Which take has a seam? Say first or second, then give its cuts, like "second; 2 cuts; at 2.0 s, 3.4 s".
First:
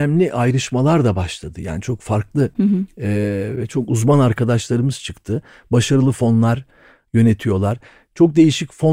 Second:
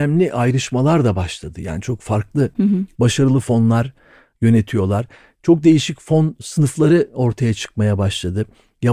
second; 1 cut; at 2.9 s